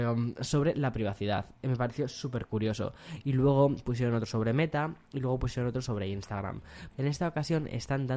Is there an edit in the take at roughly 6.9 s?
yes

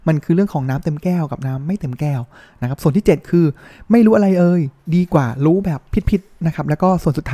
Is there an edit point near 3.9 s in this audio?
no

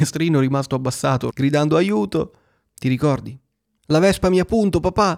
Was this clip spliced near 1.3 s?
yes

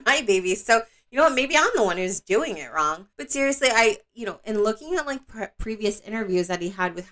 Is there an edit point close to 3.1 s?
yes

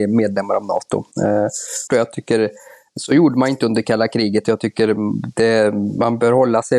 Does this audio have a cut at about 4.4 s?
no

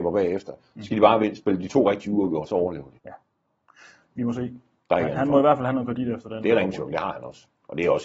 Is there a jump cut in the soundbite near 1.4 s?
no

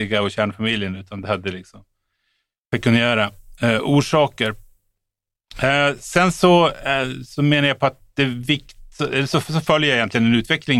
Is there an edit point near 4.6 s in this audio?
no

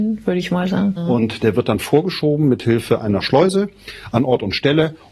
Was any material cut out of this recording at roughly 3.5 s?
no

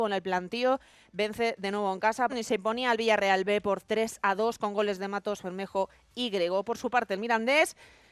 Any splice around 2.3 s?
yes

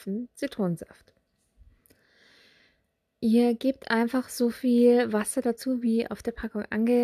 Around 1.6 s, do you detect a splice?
no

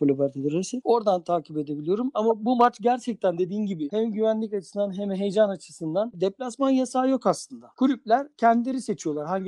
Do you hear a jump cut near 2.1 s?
no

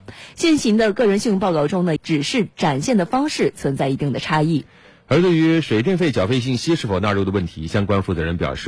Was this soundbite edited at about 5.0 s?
no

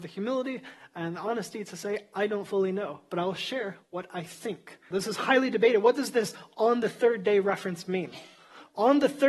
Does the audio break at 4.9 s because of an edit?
yes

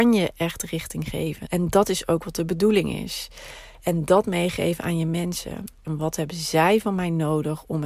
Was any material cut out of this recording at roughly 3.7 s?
no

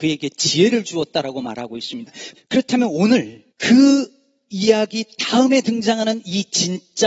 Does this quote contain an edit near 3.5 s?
yes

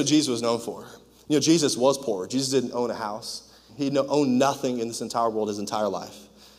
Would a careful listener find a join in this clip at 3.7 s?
yes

